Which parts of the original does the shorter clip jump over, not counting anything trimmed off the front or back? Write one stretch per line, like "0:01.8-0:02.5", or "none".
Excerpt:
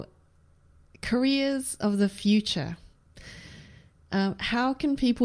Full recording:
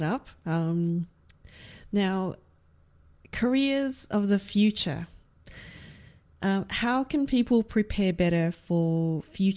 none